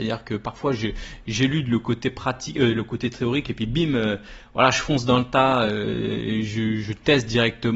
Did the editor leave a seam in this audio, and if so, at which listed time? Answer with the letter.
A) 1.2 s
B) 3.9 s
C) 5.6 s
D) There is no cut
D